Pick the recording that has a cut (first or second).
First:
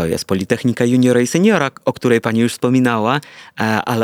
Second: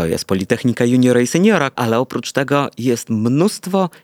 second